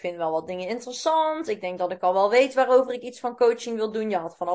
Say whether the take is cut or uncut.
uncut